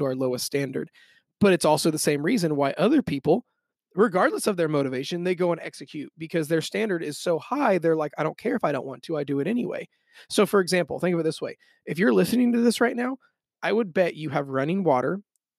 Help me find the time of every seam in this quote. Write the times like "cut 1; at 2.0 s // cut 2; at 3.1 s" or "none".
none